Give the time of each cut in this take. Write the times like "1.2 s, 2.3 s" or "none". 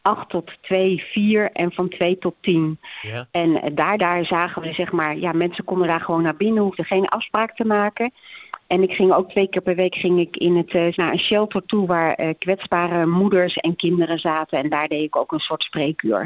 4.0 s, 10.9 s